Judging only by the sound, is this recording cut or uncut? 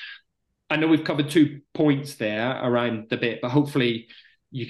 uncut